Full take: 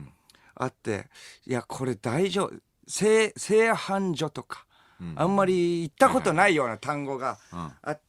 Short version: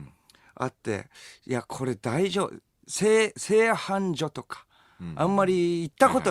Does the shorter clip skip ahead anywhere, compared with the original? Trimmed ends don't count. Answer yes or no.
no